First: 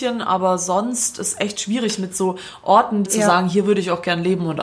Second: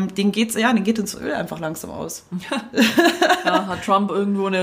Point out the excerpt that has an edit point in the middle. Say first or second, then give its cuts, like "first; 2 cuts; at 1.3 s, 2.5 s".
first; 1 cut; at 3.1 s